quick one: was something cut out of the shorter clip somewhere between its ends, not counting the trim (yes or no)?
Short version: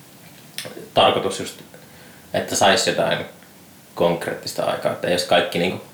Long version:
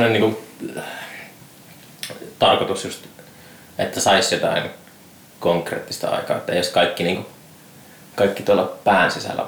no